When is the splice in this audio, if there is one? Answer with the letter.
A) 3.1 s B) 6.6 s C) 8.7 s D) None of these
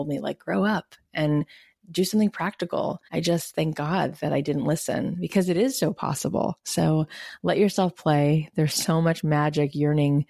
A